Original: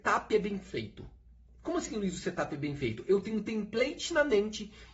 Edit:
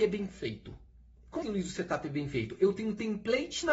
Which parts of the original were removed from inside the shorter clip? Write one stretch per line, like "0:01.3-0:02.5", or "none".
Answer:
0:01.7-0:01.9